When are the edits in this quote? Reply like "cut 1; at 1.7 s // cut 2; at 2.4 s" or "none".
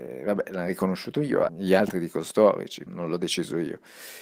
cut 1; at 1.5 s // cut 2; at 2.9 s